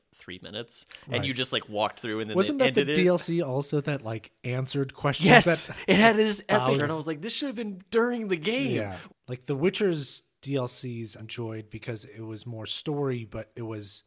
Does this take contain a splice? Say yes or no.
yes